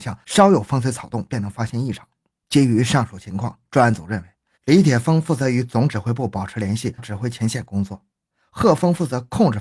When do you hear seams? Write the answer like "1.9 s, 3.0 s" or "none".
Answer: 2.3 s, 4.5 s, 7.0 s